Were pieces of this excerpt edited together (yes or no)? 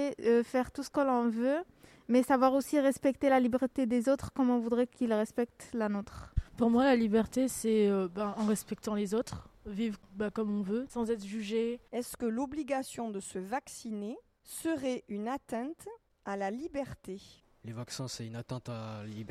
no